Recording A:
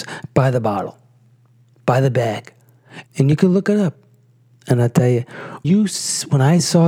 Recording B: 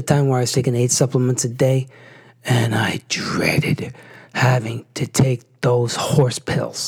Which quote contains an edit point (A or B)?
A